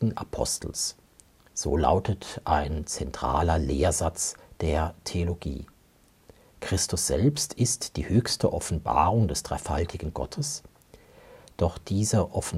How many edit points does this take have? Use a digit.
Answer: 0